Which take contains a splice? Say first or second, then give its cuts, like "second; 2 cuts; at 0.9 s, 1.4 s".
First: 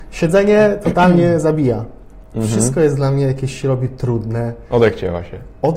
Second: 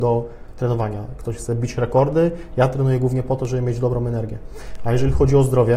first; 1 cut; at 2.3 s